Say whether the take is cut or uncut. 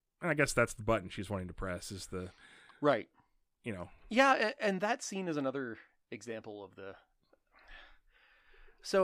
uncut